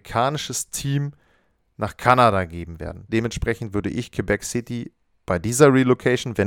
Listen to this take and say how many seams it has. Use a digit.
1